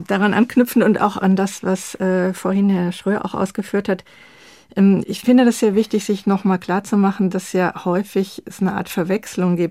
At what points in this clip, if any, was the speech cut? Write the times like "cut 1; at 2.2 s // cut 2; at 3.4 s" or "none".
none